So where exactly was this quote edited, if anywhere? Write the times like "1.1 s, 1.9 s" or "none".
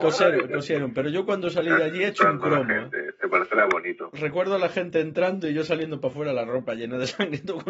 none